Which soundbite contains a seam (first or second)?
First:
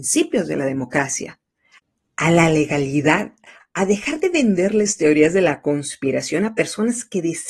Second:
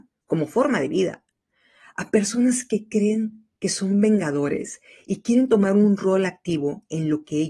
first